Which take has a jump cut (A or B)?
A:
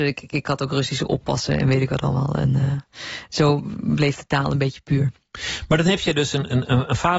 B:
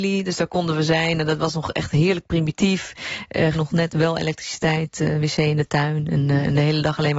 B